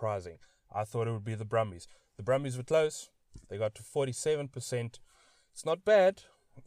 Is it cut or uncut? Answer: uncut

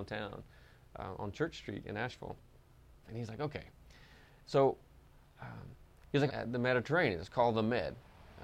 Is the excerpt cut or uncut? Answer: cut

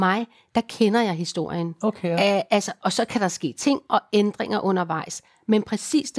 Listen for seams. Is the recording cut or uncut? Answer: uncut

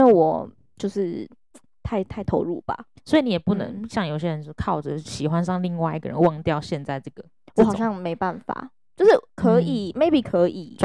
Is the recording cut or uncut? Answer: uncut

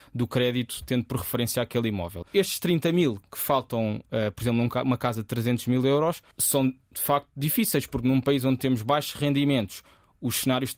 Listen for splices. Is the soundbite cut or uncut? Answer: cut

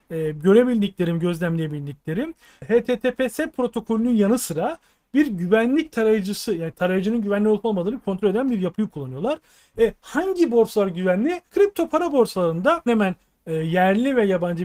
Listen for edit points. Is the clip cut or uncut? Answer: cut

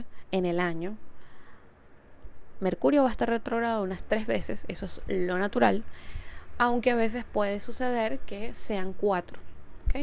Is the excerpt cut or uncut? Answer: uncut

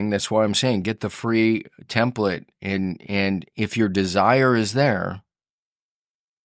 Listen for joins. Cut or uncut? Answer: uncut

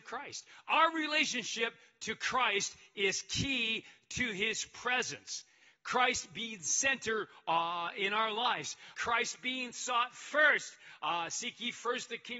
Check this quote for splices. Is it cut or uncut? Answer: cut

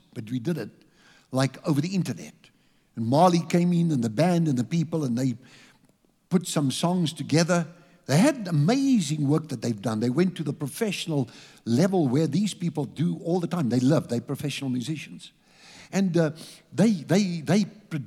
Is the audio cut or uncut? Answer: uncut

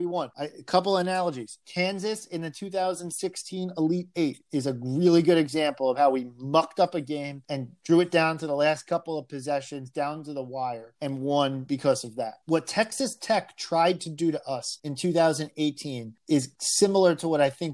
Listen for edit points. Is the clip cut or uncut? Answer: uncut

